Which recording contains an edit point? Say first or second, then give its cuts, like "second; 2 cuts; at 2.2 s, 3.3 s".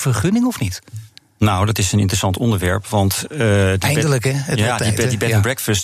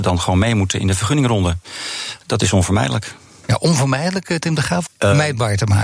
second; 1 cut; at 4.9 s